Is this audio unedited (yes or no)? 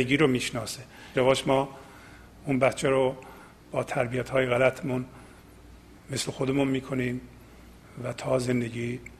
no